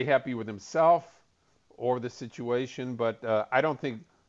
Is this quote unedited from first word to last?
yes; 0 cuts

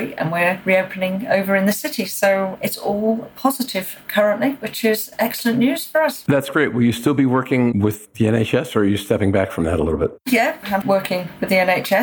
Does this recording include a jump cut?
yes; 1 cut; at 10.8 s

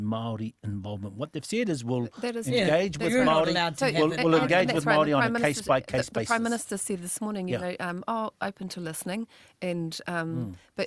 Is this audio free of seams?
yes; 0 cuts

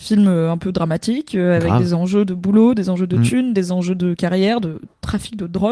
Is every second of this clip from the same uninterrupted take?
yes; 0 cuts

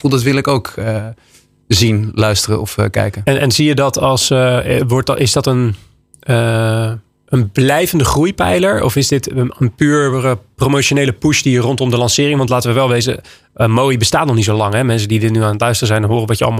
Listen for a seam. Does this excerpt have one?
no; 0 cuts

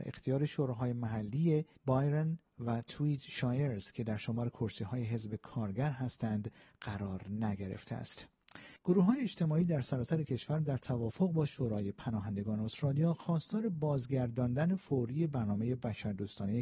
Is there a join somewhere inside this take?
yes; 2 cuts; at 2.4 s, 8.8 s

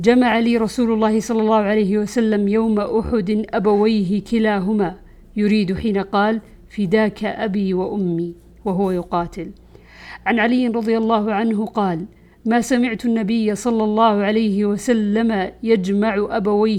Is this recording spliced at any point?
no; 0 cuts

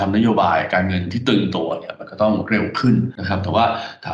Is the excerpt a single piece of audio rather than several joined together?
yes; 0 cuts

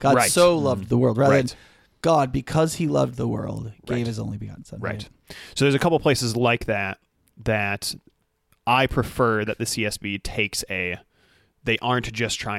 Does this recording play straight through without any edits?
yes; 0 cuts

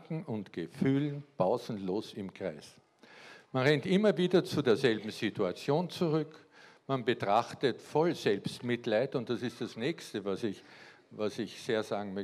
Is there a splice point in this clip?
no; 0 cuts

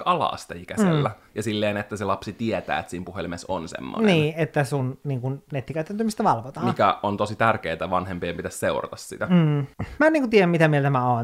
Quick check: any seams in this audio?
no; 0 cuts

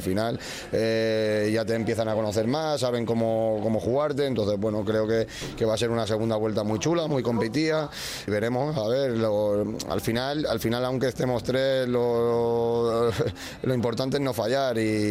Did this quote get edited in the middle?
yes; 1 cut; at 8.3 s

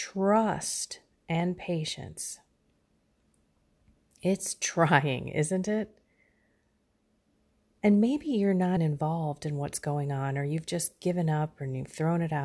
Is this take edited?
yes; 1 cut; at 8.8 s

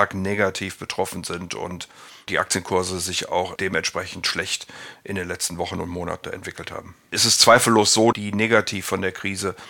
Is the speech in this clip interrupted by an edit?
yes; 2 cuts; at 7.1 s, 8.1 s

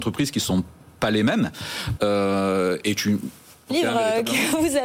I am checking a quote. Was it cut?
yes; 2 cuts; at 2.0 s, 3.7 s

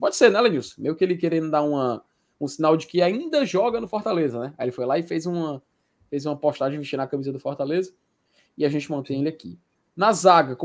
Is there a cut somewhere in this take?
no; 0 cuts

